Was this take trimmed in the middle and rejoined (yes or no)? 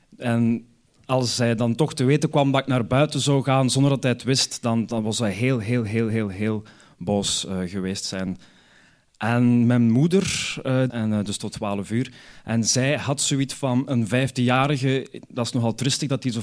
yes